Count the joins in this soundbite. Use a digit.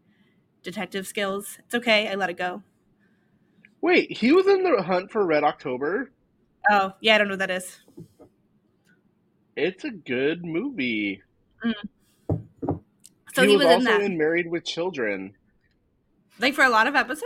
0